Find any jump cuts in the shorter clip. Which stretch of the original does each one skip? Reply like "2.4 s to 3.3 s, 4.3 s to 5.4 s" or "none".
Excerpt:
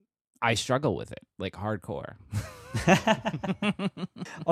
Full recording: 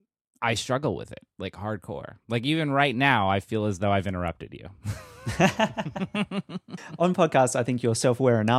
2.2 s to 4.7 s